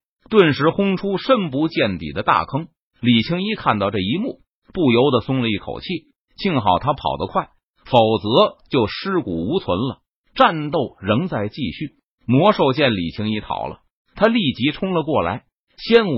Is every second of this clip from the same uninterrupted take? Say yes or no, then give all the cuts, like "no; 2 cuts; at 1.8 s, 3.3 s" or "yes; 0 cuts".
yes; 0 cuts